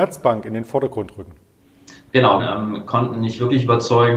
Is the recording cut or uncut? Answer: cut